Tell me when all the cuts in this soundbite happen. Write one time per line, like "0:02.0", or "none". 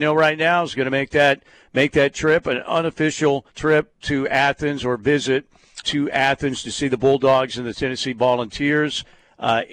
0:03.5
0:05.8